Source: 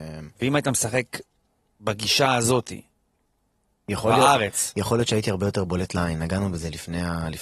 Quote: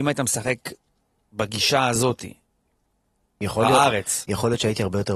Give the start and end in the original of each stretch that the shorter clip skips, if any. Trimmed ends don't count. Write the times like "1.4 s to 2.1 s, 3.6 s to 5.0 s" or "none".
none